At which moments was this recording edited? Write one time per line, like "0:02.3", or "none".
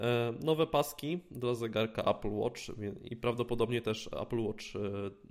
none